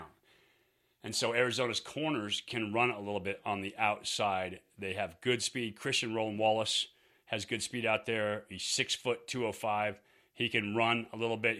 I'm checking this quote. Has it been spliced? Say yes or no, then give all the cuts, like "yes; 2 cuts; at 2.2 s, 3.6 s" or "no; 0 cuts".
no; 0 cuts